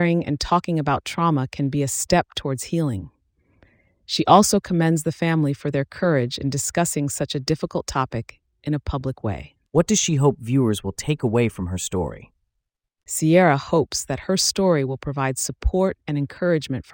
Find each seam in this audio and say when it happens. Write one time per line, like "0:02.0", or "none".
0:09.7